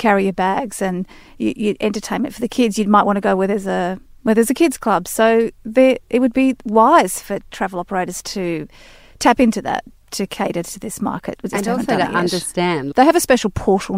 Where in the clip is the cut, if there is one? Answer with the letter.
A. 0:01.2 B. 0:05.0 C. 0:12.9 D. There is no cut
C